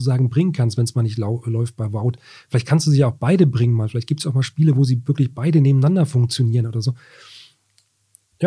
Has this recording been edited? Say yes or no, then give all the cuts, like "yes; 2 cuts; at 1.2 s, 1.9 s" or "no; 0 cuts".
no; 0 cuts